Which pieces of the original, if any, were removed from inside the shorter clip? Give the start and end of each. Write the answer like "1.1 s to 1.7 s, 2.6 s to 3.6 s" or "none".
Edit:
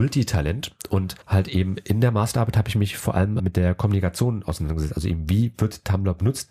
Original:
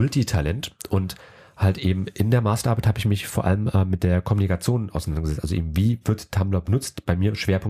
1.2 s to 1.5 s, 3.7 s to 3.9 s